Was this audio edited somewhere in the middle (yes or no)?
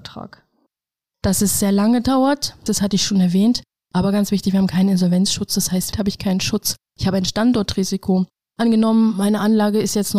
yes